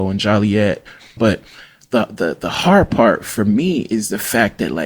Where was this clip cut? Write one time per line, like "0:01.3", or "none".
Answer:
0:01.2